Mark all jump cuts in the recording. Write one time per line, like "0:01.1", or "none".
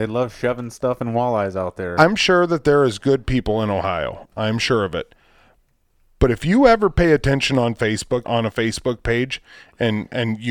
0:08.2